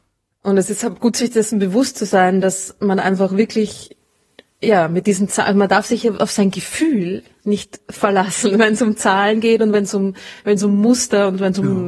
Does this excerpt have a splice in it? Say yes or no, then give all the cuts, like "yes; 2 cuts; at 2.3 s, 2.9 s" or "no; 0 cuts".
no; 0 cuts